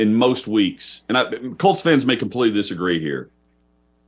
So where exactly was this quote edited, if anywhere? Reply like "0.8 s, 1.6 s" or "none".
none